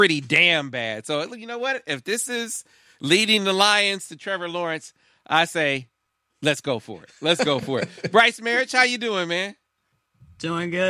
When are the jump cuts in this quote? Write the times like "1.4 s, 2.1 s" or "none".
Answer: none